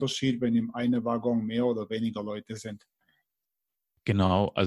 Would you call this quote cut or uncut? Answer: uncut